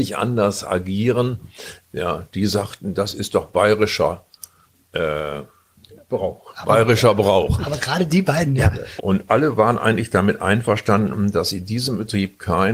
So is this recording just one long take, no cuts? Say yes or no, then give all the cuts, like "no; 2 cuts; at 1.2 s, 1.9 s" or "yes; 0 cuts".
no; 2 cuts; at 1.8 s, 9.0 s